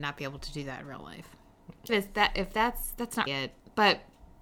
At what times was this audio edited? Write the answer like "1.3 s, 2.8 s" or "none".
1.9 s, 3.3 s